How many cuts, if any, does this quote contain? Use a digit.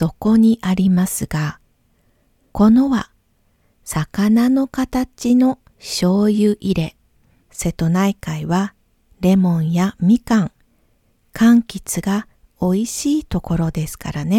2